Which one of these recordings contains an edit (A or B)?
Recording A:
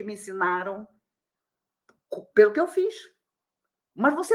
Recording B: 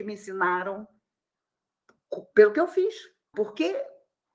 B